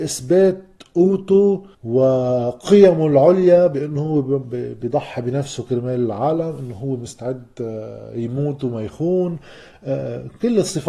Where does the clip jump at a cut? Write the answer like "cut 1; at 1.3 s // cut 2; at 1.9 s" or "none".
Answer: cut 1; at 1.7 s